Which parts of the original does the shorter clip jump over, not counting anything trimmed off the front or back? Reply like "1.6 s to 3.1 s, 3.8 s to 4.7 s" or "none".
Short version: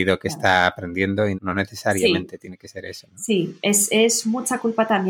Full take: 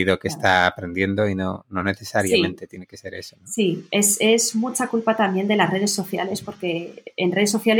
1.3 s to 1.6 s